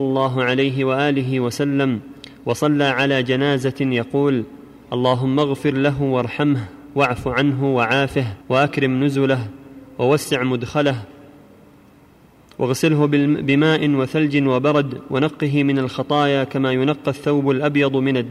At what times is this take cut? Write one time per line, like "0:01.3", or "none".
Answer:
0:08.4